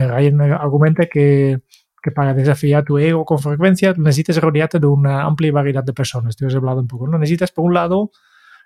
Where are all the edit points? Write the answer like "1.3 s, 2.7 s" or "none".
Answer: none